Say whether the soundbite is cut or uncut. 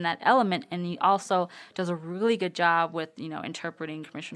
uncut